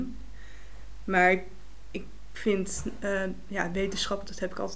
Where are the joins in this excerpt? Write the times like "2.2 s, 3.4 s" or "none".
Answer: none